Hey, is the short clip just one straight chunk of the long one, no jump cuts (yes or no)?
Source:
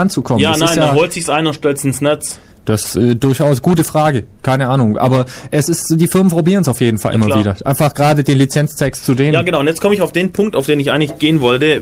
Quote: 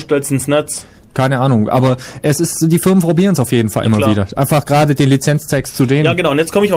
no